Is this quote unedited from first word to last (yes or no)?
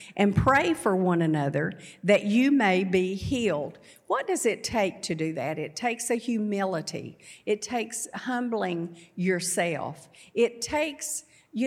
yes